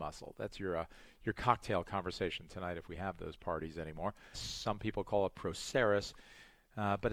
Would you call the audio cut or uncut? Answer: cut